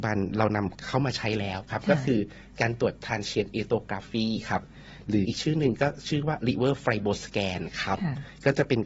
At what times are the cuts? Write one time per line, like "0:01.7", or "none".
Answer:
0:05.2